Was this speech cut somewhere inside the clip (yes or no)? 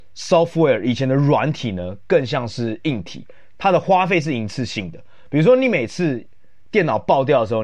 no